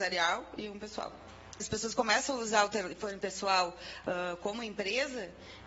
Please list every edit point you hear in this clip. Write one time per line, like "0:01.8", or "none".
0:01.6